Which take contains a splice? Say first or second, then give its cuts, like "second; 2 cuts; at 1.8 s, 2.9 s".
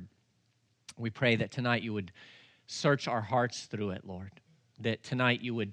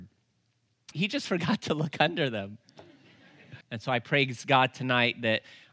second; 2 cuts; at 0.9 s, 3.6 s